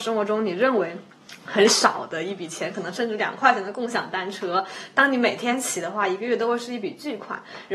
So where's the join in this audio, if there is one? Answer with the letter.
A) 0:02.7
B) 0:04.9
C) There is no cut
C